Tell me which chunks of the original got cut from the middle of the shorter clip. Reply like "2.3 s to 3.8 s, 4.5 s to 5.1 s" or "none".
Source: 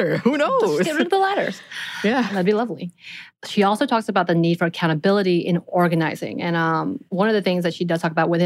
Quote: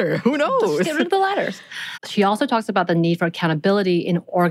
1.9 s to 3.3 s